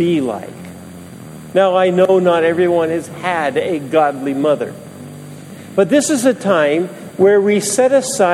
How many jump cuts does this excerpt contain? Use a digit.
0